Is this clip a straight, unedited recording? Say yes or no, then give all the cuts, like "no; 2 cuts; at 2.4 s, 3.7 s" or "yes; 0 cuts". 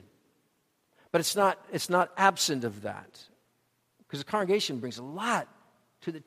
yes; 0 cuts